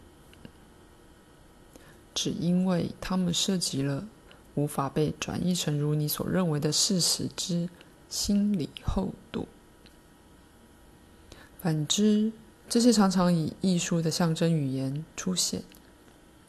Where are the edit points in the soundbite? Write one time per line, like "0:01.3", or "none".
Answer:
none